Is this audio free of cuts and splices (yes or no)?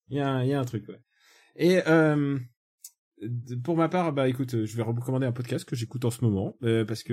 yes